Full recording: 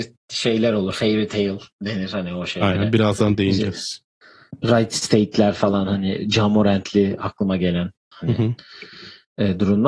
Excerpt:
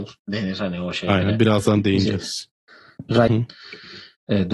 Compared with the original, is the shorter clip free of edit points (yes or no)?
no